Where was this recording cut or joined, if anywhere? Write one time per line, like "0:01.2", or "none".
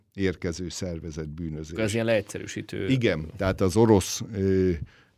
none